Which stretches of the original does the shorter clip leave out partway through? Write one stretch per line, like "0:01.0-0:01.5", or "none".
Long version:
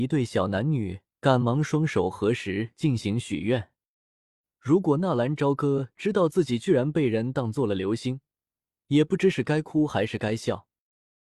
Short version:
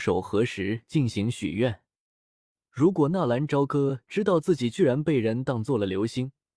none